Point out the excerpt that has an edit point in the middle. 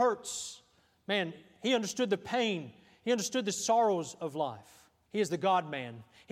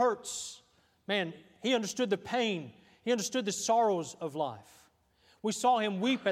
first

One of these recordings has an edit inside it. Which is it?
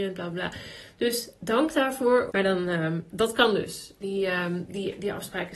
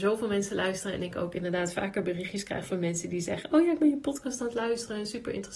first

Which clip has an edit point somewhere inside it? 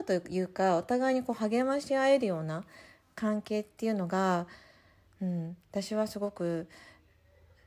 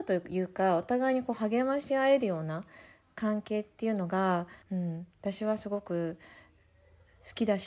second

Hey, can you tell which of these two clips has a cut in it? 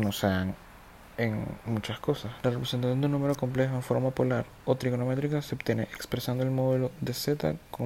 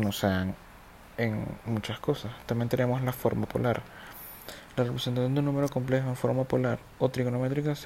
first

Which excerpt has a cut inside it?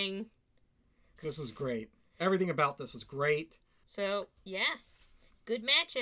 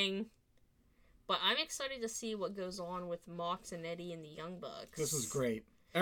first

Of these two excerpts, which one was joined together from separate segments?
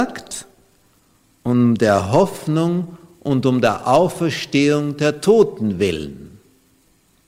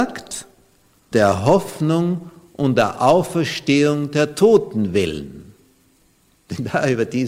second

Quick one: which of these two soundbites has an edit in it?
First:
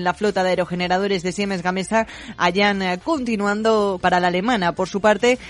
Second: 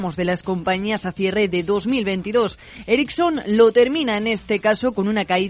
first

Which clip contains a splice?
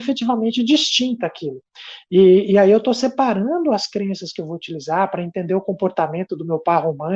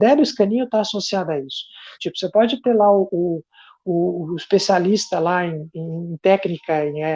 second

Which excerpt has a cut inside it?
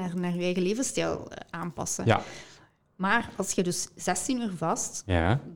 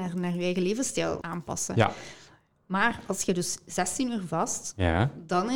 second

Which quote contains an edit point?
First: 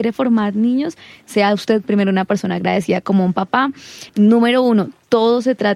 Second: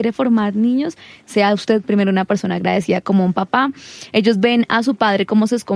first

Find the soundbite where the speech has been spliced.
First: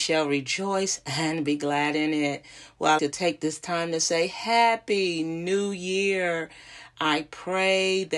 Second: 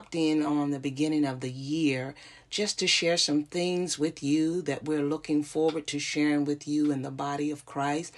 first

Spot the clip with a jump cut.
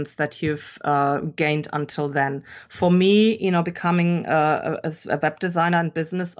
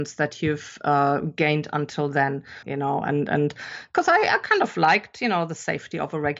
second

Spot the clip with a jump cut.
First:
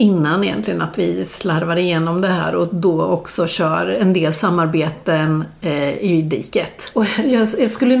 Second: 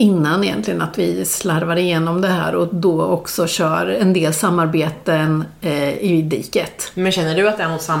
first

